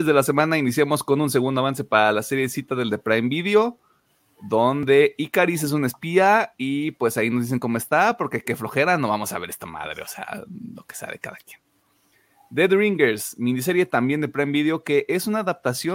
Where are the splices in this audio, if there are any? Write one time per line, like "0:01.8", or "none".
none